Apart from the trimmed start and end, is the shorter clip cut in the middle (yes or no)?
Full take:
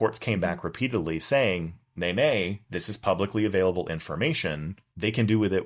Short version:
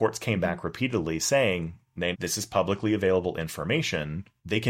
yes